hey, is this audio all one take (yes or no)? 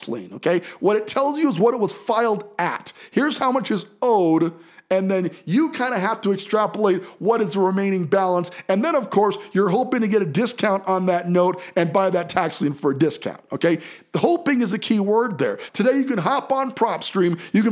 no